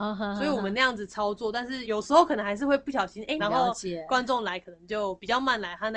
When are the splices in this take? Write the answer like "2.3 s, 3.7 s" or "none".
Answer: 1.8 s, 3.4 s